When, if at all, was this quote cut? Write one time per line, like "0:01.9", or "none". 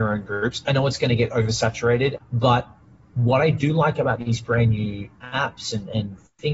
0:02.2